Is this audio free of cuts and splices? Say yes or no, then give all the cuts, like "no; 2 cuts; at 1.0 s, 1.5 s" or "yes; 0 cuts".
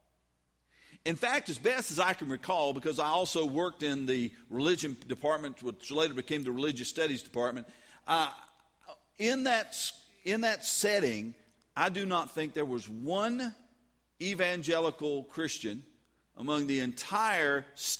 yes; 0 cuts